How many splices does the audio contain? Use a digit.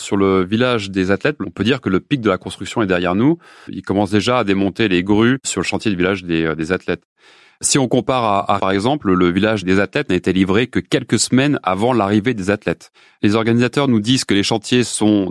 3